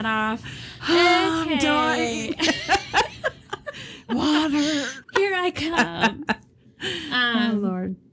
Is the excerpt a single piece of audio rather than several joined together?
no; 1 cut; at 5.0 s

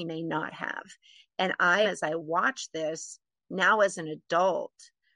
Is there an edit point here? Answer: yes; 1 cut; at 1.8 s

